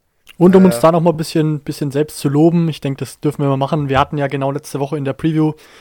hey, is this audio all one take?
yes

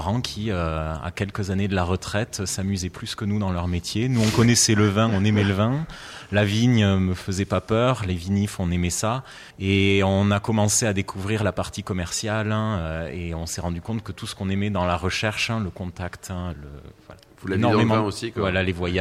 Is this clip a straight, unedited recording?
no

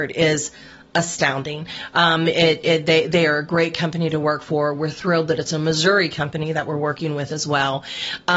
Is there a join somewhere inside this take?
no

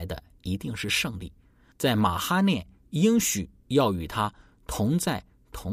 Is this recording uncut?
no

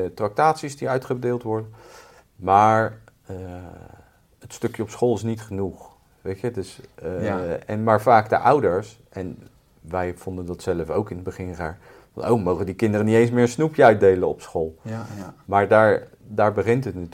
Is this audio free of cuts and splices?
yes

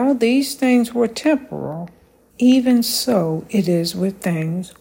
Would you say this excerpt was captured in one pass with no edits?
no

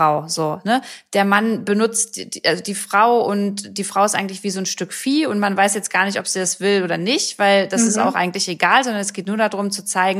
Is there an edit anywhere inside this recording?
no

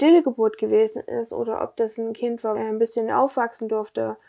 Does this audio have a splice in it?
yes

